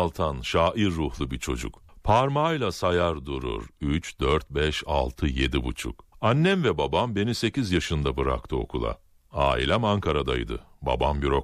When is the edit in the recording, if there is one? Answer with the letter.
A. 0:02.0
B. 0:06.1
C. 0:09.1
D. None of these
B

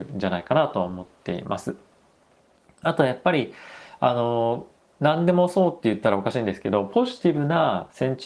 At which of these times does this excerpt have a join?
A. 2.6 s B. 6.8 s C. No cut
C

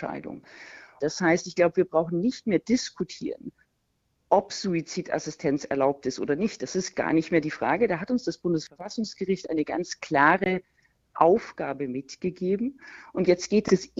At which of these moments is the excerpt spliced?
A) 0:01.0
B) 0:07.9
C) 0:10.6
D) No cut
A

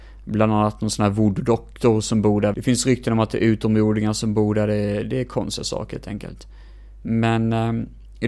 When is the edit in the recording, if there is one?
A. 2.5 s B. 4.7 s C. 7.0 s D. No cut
A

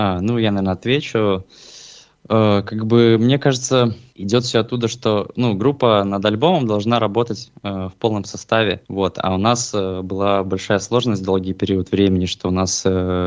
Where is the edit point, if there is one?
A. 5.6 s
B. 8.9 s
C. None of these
B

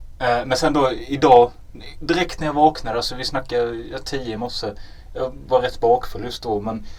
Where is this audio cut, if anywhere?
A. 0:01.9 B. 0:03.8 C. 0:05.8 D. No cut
D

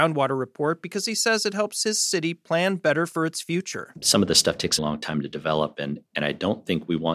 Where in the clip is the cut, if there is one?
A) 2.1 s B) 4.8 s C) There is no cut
B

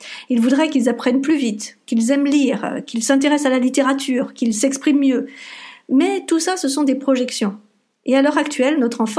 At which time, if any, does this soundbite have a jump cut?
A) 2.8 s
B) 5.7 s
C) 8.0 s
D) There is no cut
D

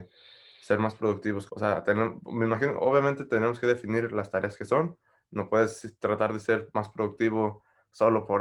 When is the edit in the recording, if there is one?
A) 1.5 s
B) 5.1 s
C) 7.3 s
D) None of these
A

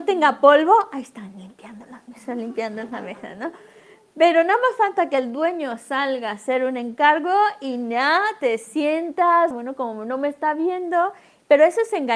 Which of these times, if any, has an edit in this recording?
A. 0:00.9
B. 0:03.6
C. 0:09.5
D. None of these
C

